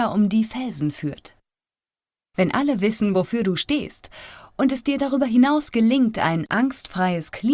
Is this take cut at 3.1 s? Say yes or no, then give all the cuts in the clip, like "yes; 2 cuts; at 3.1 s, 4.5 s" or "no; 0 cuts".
no; 0 cuts